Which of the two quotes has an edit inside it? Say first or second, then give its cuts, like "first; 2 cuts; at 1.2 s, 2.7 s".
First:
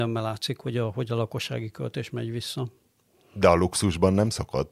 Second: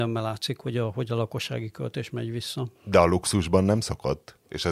second; 1 cut; at 2.7 s